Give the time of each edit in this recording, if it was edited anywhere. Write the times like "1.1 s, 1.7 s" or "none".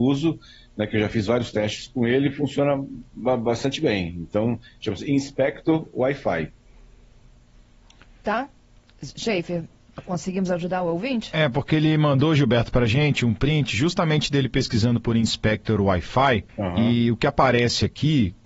16.5 s